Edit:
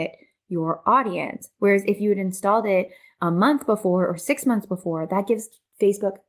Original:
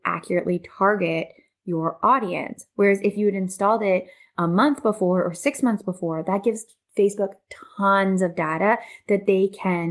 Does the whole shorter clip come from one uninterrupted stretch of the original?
yes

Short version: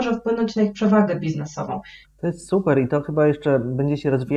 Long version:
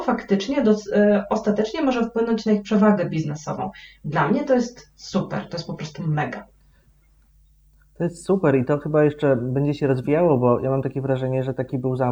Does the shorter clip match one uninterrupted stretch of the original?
no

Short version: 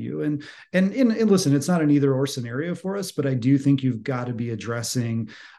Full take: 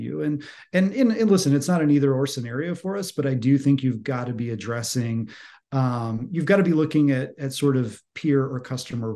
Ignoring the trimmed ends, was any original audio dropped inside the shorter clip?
no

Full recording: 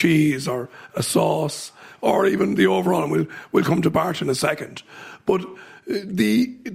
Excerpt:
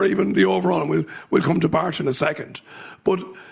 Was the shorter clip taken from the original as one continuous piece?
yes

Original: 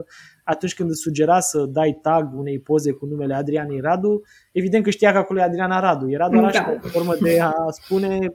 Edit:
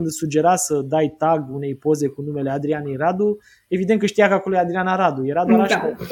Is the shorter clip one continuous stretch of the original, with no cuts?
yes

